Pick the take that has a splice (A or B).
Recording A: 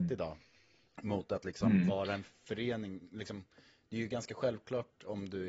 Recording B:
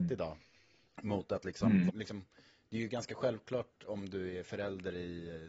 B